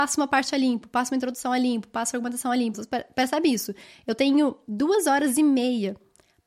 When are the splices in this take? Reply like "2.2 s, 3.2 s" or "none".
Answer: 2.7 s